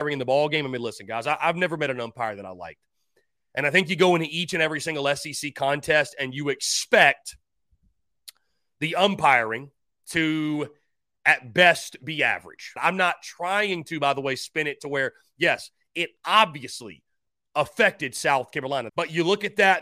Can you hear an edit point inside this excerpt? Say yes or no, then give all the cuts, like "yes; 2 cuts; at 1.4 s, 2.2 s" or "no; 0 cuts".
yes; 2 cuts; at 12.8 s, 18.9 s